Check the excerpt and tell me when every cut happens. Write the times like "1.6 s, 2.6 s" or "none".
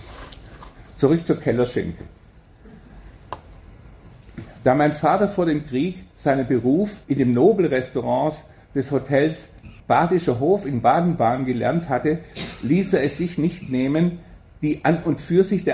7.0 s, 9.8 s